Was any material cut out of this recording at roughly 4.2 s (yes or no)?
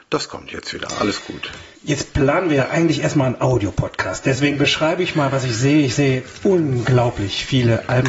no